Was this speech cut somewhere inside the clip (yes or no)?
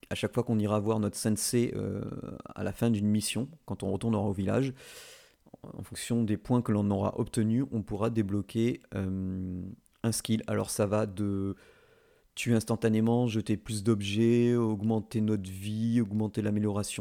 no